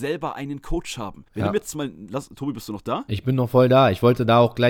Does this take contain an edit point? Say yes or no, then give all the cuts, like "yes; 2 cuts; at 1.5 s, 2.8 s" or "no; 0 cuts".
yes; 1 cut; at 1.3 s